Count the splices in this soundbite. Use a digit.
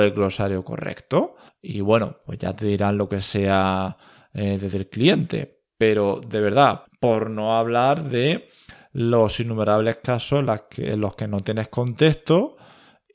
2